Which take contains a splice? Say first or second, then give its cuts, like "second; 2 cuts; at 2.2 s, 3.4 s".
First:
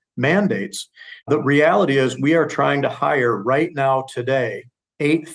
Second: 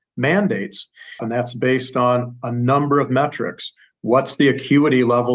second; 1 cut; at 1.2 s